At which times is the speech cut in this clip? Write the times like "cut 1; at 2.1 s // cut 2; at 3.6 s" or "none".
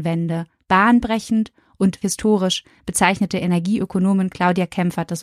cut 1; at 2.0 s